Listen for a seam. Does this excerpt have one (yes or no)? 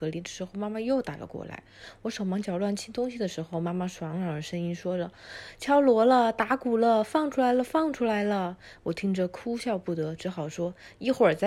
no